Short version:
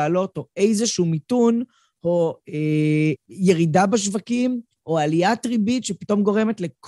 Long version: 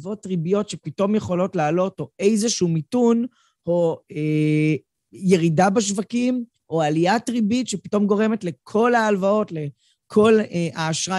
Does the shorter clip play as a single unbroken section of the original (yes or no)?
no